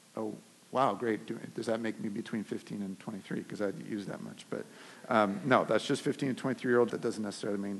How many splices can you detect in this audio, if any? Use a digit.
1